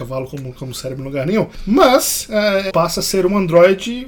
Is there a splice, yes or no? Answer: yes